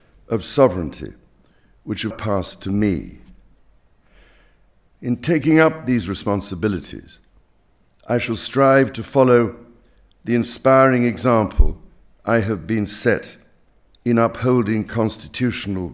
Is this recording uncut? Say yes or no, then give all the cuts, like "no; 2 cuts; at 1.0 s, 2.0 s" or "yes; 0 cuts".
no; 1 cut; at 2.1 s